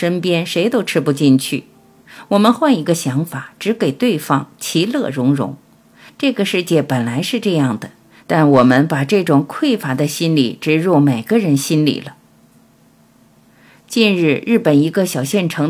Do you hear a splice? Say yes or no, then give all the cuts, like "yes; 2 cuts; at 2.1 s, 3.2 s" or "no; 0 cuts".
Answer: yes; 1 cut; at 6.1 s